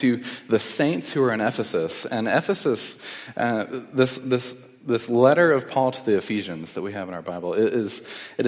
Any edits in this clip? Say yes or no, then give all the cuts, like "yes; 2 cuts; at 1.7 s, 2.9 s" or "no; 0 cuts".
no; 0 cuts